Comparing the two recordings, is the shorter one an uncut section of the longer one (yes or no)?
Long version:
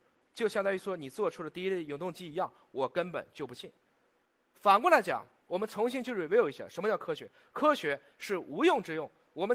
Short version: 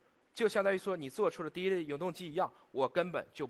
yes